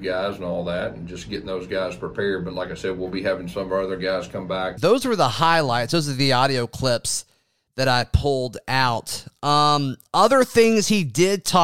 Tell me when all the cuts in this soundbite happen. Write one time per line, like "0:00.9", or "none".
0:04.8